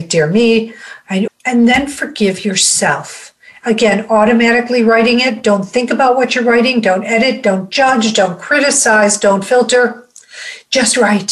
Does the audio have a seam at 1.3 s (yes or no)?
yes